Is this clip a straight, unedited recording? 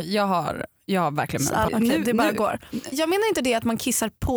no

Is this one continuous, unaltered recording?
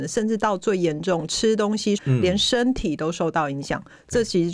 no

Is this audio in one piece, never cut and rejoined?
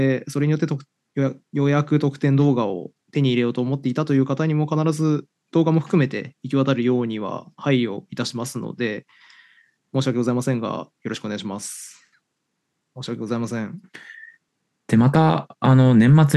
no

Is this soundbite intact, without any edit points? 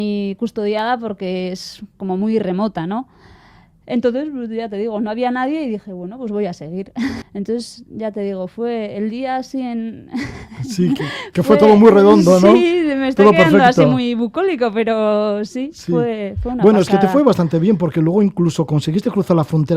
no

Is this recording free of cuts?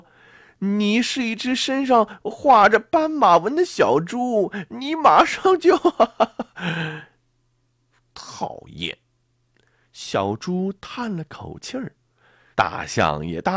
no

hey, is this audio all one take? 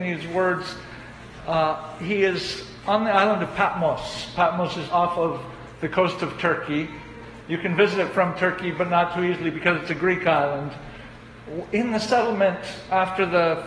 no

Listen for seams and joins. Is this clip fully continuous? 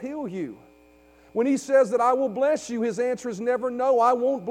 yes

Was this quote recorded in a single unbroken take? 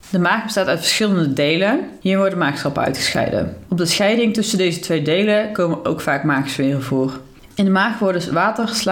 no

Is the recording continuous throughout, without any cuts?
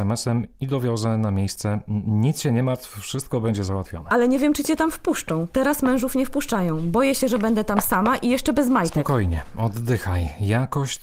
yes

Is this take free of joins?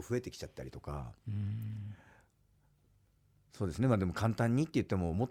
yes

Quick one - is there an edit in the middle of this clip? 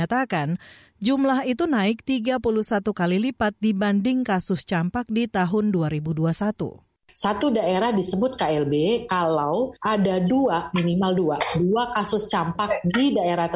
no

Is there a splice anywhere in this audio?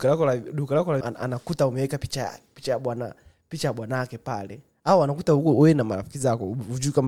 yes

